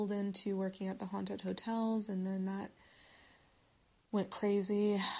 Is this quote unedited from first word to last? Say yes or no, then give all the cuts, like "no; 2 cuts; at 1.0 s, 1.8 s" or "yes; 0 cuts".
yes; 0 cuts